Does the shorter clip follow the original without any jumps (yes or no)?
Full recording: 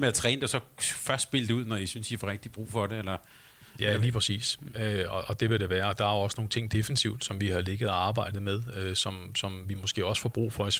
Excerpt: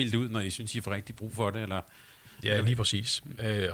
yes